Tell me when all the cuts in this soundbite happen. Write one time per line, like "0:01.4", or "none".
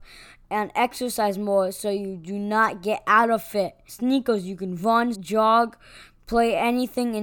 0:03.9
0:05.1